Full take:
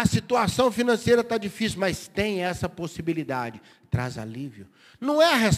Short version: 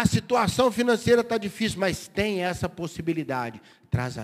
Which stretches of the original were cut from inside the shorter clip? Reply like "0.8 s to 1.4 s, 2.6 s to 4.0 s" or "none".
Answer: none